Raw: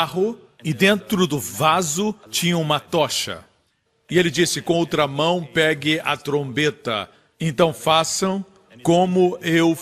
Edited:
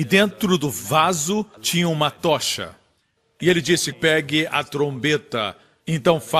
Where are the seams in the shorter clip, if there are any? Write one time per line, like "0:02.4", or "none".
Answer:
0:03.9